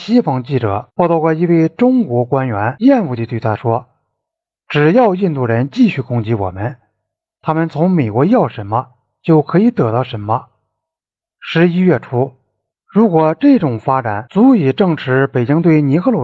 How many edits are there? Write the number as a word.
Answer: two